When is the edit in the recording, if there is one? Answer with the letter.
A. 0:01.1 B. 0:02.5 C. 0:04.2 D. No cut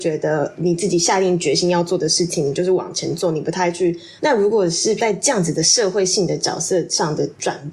C